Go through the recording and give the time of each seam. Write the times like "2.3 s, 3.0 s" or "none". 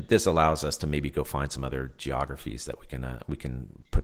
none